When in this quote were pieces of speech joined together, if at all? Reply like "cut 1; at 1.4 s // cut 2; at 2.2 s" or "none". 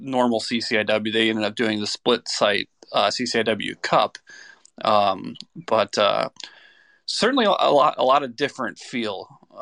none